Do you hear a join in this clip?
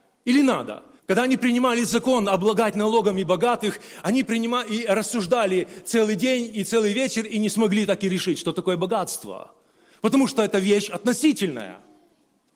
yes; 1 cut; at 1.0 s

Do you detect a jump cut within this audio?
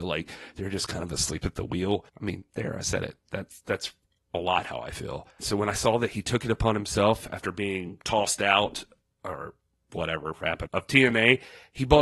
yes; 2 cuts; at 5.4 s, 10.7 s

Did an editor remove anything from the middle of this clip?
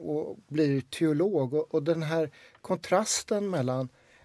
no; 0 cuts

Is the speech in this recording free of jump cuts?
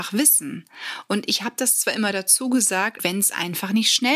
no; 1 cut; at 3.0 s

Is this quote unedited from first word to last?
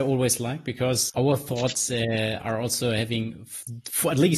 no; 1 cut; at 1.1 s

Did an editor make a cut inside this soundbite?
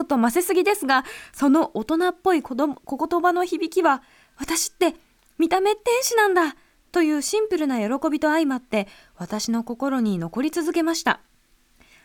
no; 0 cuts

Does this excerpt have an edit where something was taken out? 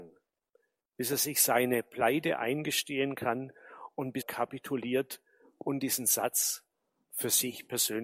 yes; 1 cut; at 4.2 s

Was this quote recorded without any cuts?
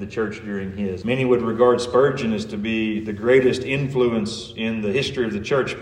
no; 1 cut; at 1.0 s

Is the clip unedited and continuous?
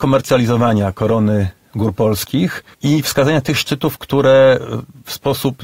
no; 1 cut; at 2.7 s

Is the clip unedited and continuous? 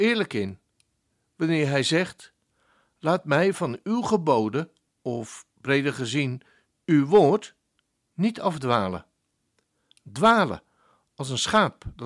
yes; 0 cuts

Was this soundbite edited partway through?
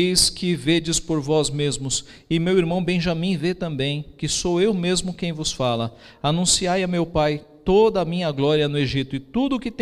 no; 0 cuts

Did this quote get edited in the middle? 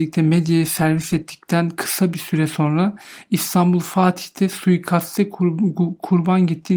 no; 0 cuts

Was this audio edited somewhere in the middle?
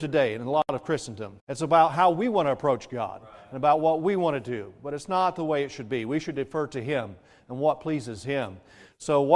yes; 1 cut; at 1.4 s

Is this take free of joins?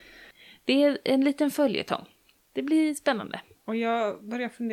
no; 1 cut; at 3.5 s

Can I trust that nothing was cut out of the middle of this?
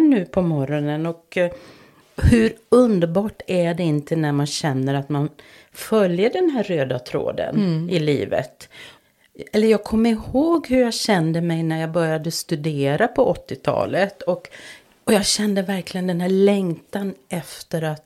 yes; 0 cuts

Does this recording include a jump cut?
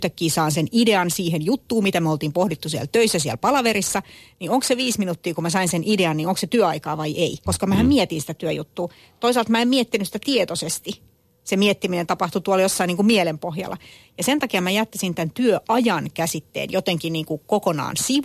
yes; 1 cut; at 7.5 s

